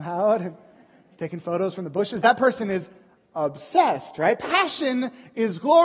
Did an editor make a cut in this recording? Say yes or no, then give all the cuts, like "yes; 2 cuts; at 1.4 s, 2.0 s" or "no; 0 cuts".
no; 0 cuts